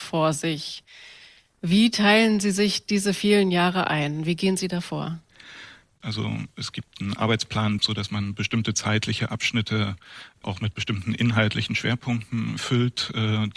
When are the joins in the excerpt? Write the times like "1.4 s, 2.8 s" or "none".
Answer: 6.0 s, 7.8 s